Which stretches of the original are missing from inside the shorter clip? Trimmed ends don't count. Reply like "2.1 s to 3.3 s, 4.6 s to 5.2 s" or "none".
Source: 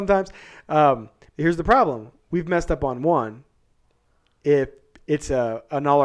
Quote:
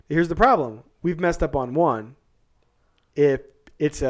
none

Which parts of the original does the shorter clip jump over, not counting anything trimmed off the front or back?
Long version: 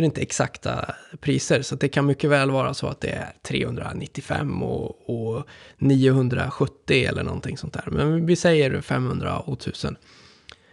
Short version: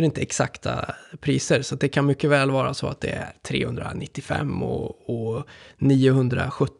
none

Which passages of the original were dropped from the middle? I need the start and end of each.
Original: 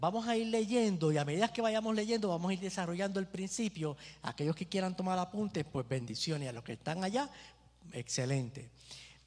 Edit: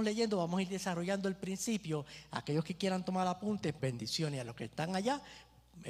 5.7 s to 5.9 s

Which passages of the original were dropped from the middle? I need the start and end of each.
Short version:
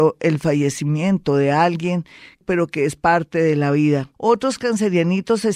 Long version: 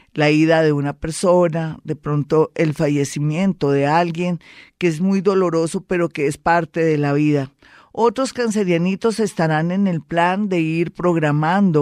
4.8 s to 5.8 s, 7.6 s to 7.9 s

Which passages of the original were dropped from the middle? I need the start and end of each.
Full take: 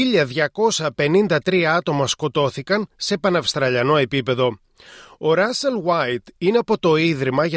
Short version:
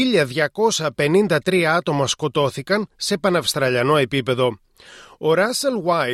none

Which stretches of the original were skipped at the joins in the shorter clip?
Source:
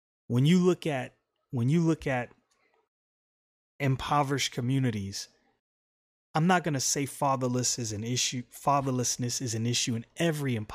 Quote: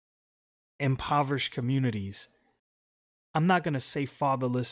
none

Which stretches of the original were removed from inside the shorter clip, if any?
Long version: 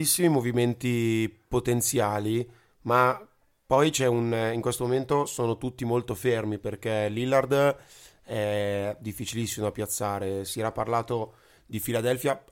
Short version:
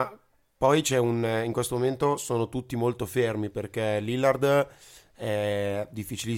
none

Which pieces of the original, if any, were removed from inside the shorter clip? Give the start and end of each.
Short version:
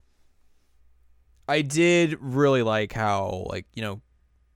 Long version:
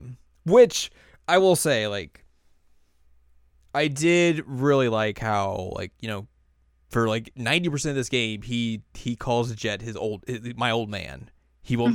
none

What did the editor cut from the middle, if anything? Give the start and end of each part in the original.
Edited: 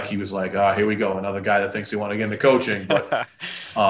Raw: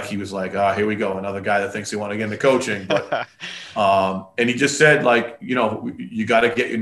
none

